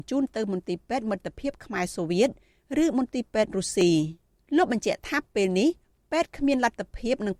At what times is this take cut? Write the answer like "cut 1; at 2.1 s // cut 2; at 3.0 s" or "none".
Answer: none